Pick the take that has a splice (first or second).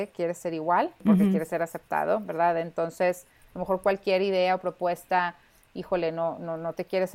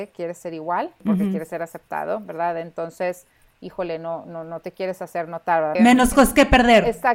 second